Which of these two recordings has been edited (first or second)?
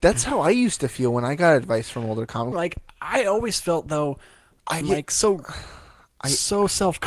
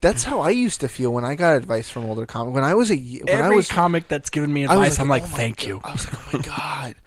first